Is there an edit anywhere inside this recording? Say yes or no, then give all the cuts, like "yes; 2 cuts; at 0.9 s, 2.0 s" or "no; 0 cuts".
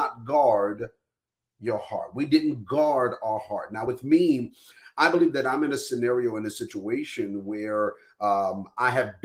no; 0 cuts